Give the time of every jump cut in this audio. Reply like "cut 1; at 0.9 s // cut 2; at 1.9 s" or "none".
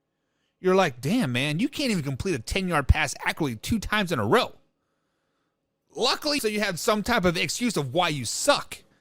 cut 1; at 6.4 s

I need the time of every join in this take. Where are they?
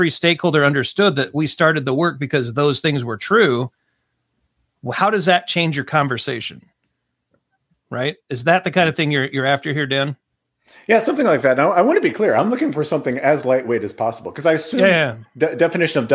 none

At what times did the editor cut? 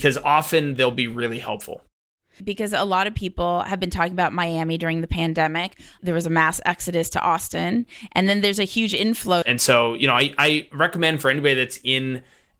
cut 1; at 2.4 s // cut 2; at 9.4 s

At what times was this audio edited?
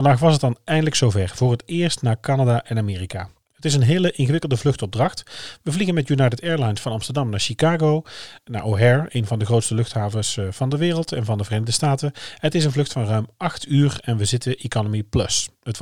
none

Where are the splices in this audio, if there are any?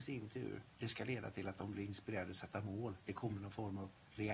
none

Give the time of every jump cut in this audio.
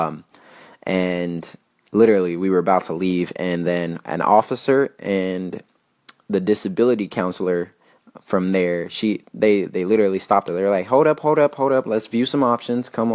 none

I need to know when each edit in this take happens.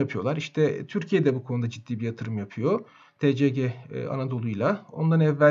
none

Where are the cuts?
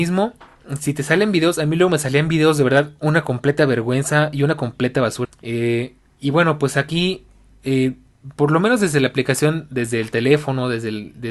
cut 1; at 5.2 s

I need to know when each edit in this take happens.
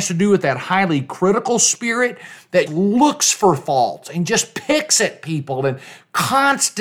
cut 1; at 2.7 s

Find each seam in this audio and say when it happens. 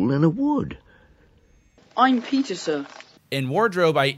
cut 1; at 1.8 s // cut 2; at 3.2 s

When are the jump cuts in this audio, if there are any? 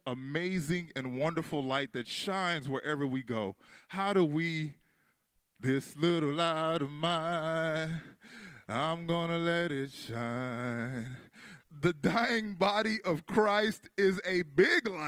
cut 1; at 5.6 s // cut 2; at 11.6 s

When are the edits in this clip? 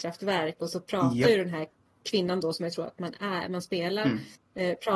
cut 1; at 2.0 s

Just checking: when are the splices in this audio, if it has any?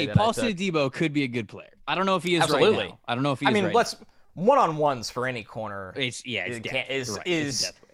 cut 1; at 1.8 s

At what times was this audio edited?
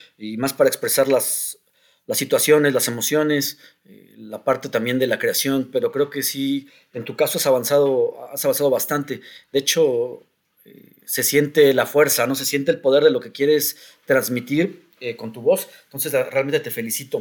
none

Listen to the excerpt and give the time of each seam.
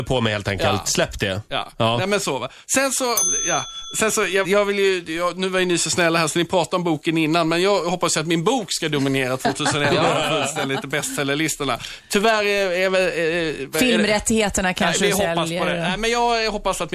cut 1; at 4.4 s

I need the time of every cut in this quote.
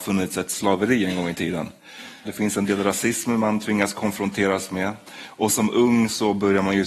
cut 1; at 2.2 s

